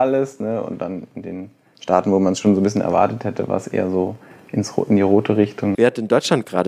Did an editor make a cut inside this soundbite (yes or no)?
yes